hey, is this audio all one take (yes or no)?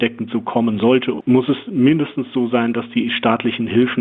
yes